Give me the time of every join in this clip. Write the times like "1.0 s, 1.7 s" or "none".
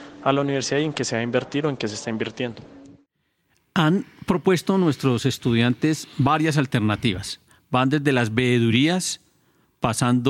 none